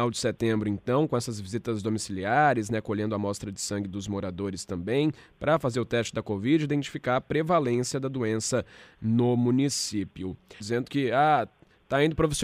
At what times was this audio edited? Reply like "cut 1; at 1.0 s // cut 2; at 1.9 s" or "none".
cut 1; at 10.6 s